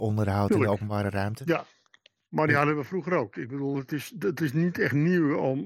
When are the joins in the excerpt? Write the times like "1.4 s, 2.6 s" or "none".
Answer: none